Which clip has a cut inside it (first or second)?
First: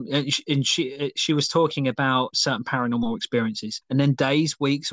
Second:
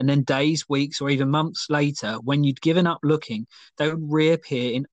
first